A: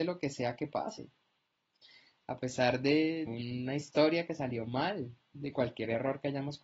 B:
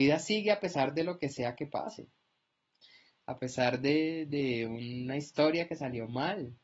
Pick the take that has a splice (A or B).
A